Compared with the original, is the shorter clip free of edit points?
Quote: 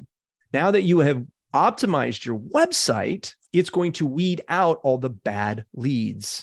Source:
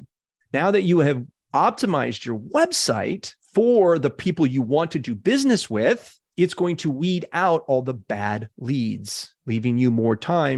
no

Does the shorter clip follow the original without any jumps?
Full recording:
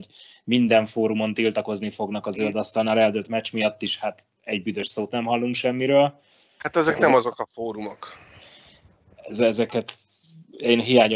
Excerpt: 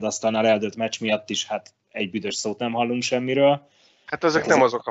yes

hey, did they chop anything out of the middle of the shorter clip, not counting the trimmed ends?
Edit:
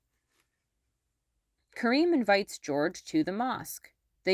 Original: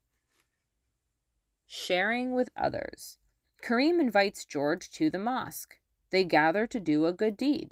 yes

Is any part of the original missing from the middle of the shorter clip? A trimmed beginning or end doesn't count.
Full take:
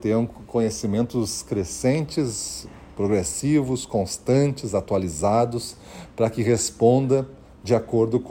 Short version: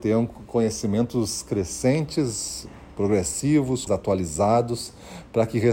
yes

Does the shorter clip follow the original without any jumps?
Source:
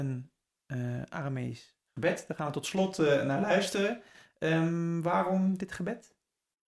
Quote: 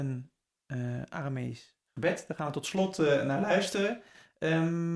yes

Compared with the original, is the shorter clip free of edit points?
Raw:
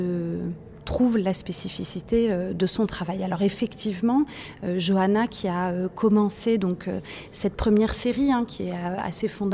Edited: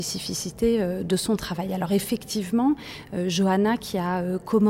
yes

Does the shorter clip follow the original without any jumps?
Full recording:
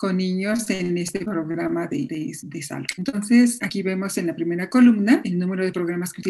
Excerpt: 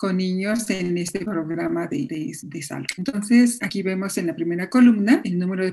yes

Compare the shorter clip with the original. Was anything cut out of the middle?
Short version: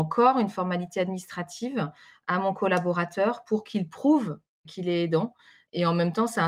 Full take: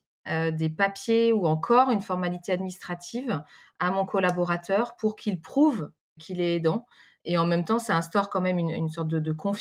no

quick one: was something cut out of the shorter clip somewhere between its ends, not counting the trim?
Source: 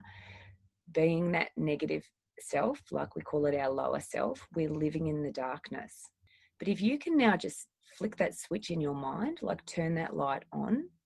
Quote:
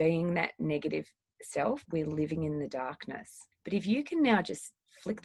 yes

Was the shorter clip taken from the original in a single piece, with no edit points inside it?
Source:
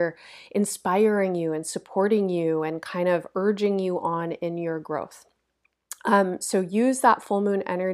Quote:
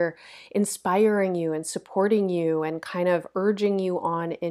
yes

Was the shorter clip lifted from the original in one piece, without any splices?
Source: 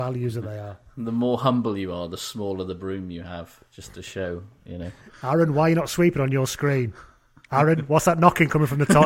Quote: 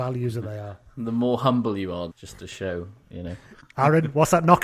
no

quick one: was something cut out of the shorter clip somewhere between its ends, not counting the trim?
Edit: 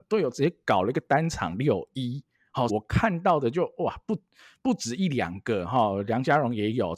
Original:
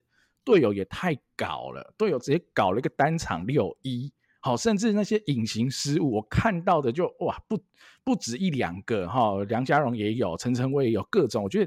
yes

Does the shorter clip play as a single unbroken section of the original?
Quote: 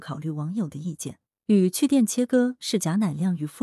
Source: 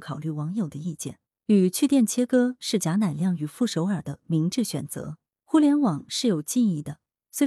yes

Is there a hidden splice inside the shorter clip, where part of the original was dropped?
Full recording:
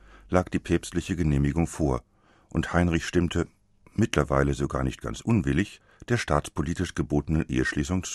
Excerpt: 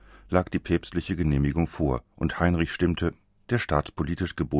yes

